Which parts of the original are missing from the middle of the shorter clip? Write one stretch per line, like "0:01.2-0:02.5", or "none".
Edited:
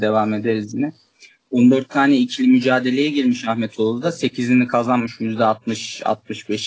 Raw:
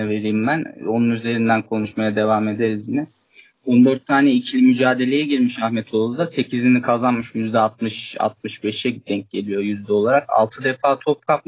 none

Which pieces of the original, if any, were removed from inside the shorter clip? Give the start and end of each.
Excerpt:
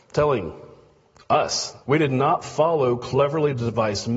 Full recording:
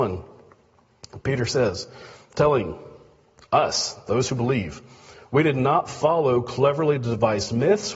0:04.0-0:05.3

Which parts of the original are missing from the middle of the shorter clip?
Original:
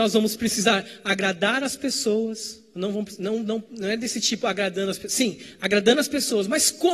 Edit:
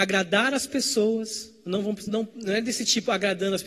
0:03.2-0:03.4

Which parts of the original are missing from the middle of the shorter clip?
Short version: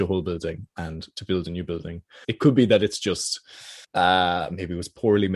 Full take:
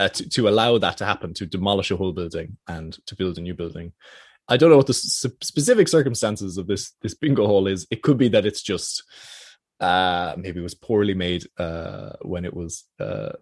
0:04.1-0:07.9
0:09.5-0:09.7

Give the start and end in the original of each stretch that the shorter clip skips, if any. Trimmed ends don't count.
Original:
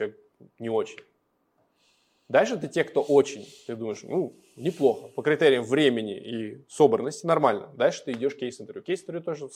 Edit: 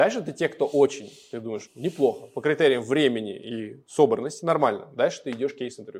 0:04.0-0:04.5

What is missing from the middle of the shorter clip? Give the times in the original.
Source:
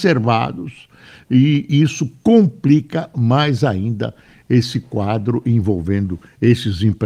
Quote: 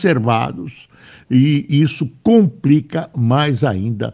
none

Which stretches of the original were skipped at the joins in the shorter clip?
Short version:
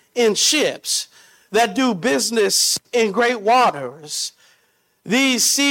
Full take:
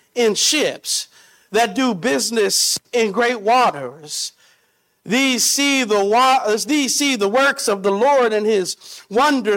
none

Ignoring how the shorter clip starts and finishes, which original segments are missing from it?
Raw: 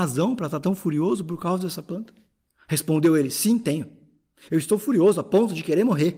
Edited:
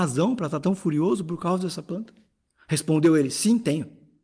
none

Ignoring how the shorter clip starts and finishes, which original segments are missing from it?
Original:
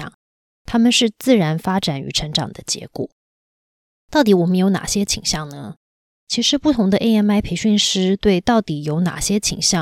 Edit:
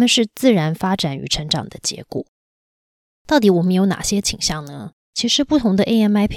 0:05.9-0:06.2

